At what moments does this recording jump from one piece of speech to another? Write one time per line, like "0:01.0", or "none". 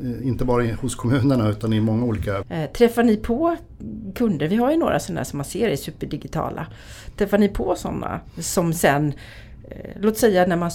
0:02.4